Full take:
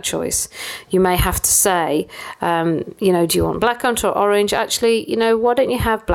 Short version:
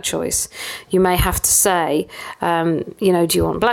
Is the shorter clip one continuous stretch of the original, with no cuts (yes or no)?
yes